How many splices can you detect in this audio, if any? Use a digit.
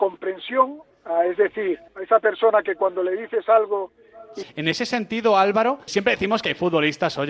3